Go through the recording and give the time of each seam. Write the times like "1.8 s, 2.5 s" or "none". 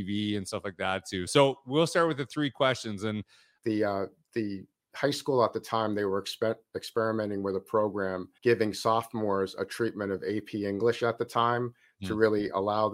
1.3 s, 3.6 s, 8.4 s